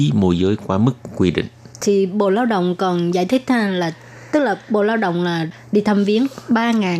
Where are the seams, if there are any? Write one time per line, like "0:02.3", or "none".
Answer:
none